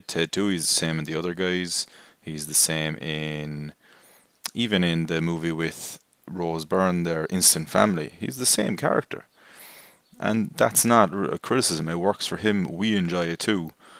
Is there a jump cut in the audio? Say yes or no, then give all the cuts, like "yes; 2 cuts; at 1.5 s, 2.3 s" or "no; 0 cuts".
no; 0 cuts